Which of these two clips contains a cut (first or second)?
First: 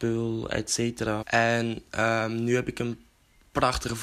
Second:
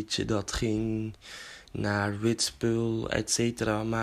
first